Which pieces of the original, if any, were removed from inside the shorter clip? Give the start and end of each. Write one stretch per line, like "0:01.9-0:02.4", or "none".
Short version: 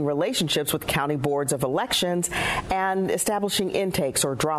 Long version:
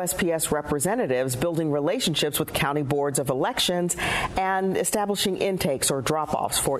none

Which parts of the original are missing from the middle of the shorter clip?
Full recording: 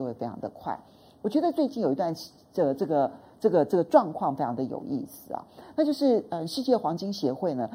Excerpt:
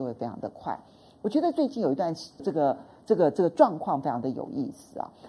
0:02.4-0:02.7

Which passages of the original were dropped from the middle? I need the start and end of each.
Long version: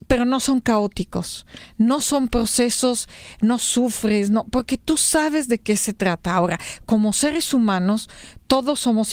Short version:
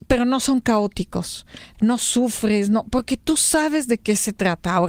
0:01.7-0:03.3

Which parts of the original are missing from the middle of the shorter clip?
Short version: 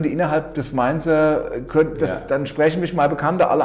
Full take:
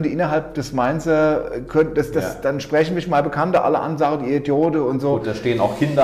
0:01.9-0:02.1

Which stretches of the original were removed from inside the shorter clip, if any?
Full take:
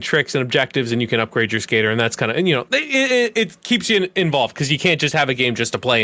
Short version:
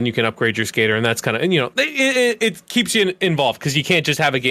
none

